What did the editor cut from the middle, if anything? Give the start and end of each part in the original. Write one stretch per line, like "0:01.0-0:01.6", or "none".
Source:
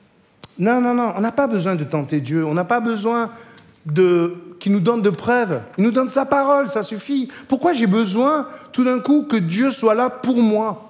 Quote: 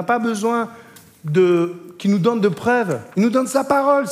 none